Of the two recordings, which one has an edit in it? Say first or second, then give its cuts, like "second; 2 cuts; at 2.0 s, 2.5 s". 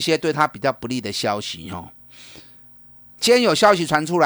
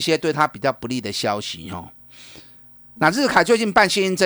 second; 1 cut; at 3.0 s